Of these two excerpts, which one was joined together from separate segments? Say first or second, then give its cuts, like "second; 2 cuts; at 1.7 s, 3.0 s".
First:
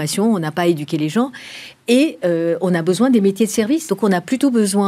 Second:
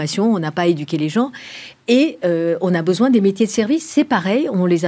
first; 1 cut; at 3.9 s